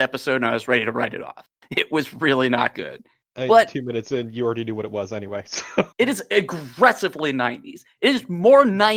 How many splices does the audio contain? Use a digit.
1